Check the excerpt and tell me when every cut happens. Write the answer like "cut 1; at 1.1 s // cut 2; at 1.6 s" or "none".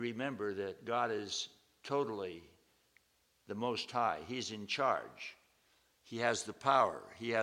none